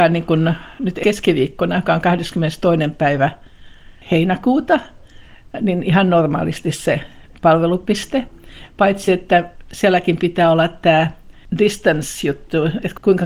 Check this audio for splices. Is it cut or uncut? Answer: uncut